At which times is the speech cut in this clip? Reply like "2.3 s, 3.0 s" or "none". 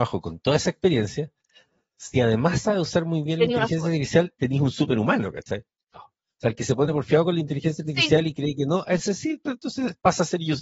5.9 s